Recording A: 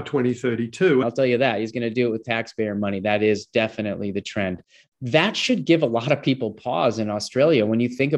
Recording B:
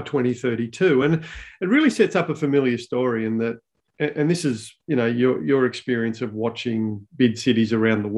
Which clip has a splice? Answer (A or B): A